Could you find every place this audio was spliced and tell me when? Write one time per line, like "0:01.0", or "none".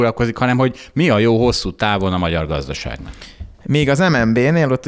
0:03.5